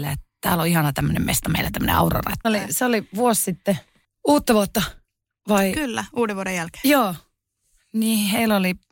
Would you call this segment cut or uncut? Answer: cut